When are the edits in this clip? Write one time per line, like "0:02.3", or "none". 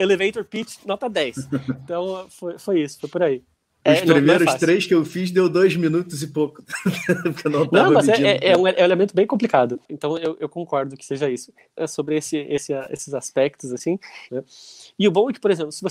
0:11.7
0:14.3